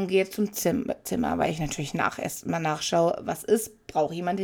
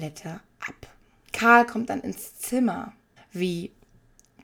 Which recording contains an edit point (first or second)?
second